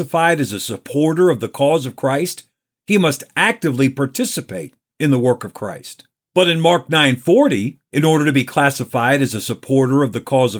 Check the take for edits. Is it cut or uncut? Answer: uncut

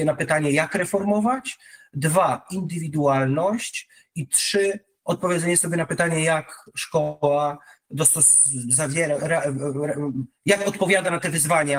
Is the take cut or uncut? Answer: uncut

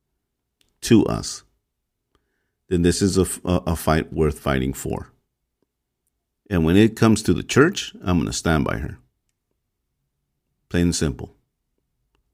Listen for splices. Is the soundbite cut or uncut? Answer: cut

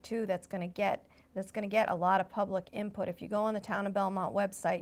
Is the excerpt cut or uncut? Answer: uncut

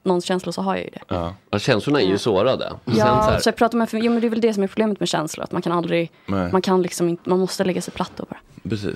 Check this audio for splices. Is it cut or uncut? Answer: uncut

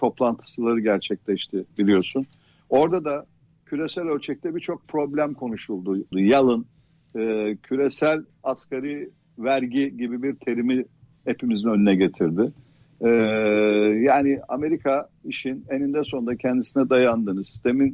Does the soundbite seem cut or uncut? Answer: cut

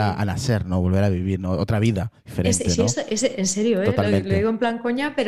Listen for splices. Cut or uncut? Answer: uncut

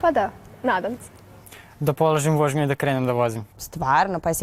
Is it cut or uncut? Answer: cut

